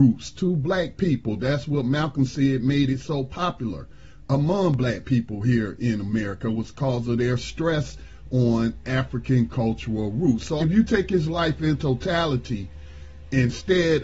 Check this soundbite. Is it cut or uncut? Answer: cut